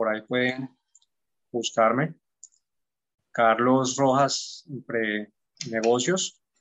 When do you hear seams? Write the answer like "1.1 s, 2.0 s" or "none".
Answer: none